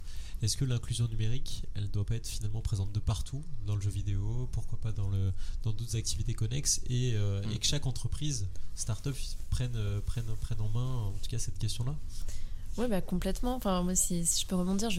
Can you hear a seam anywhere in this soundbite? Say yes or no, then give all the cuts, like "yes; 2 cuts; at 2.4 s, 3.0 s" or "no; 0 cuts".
no; 0 cuts